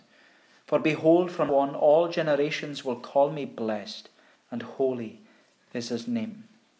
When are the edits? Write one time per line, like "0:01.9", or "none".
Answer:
0:01.5
0:04.4